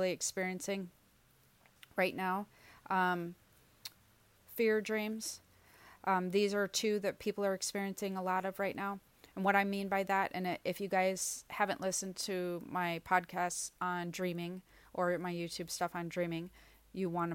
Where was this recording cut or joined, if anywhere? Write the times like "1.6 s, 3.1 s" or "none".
4.4 s